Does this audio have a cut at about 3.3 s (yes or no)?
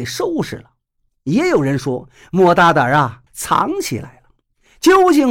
yes